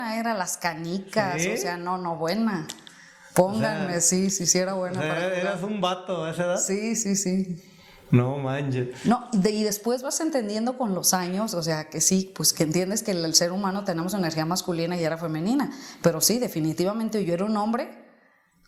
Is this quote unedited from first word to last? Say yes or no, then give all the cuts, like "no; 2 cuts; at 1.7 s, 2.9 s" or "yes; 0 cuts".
yes; 0 cuts